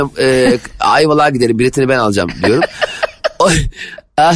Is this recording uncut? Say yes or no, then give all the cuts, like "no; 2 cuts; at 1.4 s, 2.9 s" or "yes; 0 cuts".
yes; 0 cuts